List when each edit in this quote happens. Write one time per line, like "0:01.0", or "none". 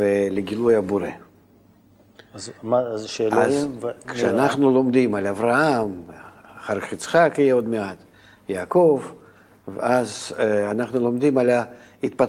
none

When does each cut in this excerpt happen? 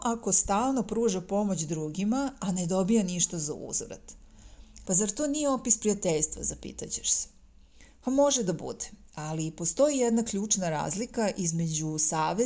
0:04.8

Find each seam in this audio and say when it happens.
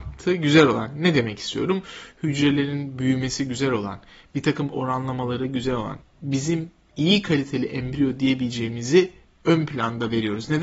0:06.0

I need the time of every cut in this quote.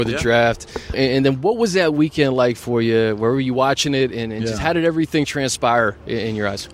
0:00.9

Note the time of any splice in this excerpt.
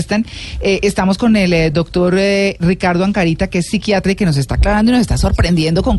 none

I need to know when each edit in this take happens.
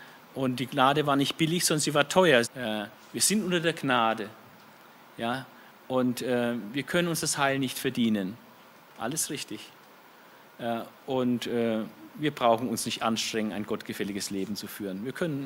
0:02.4

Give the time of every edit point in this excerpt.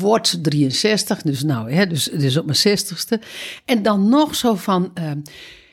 none

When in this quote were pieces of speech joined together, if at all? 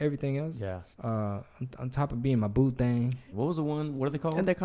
0:00.9
0:03.3

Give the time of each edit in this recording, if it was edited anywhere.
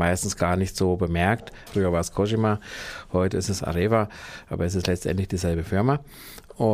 0:01.7

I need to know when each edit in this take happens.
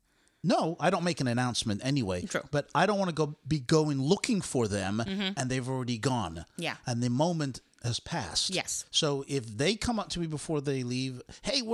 none

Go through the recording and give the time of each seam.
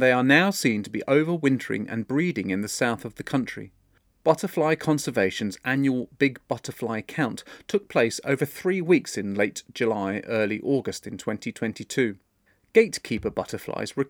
none

